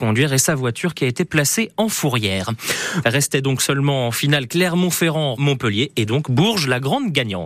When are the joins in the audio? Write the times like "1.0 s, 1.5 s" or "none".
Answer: 3.0 s, 5.4 s